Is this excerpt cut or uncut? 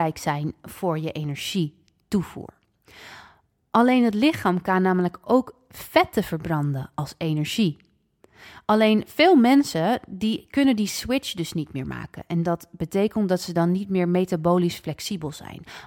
uncut